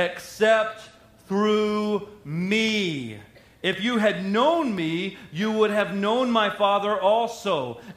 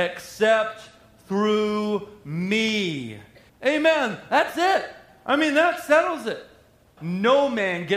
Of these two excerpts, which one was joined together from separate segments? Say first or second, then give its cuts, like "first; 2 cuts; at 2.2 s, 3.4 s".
second; 2 cuts; at 3.5 s, 7.0 s